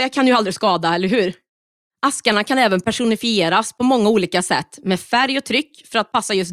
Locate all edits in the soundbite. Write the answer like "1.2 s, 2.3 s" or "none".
none